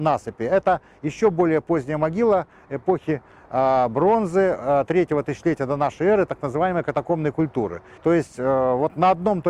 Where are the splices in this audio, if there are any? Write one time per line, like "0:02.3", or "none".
0:08.0